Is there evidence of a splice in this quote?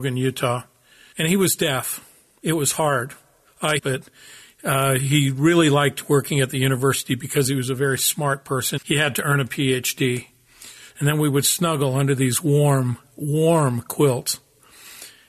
yes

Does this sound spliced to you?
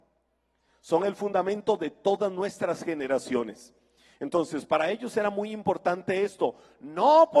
no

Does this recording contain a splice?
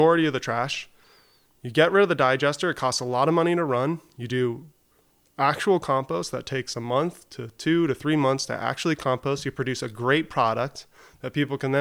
no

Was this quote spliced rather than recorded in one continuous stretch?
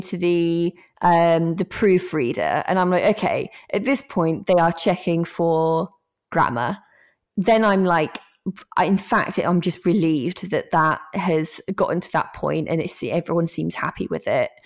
no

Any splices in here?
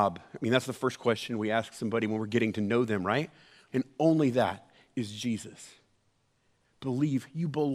yes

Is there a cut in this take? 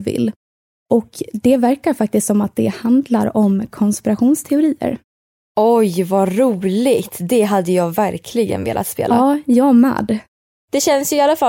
no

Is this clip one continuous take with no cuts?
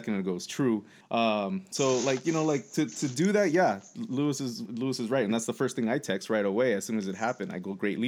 no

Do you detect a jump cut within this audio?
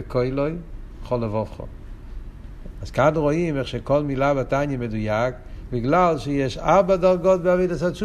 yes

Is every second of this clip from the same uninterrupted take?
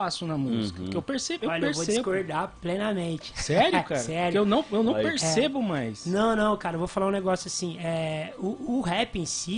yes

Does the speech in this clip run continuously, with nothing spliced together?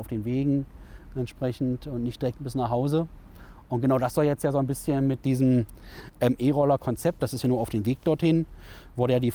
no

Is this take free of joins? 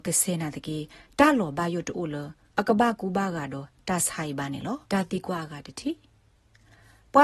no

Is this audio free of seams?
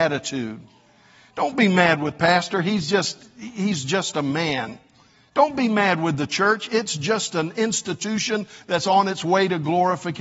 yes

